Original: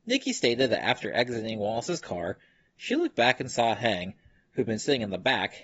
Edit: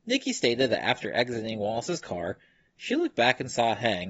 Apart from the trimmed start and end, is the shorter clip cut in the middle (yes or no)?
no